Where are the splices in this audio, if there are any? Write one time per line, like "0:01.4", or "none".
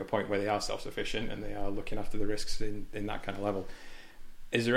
none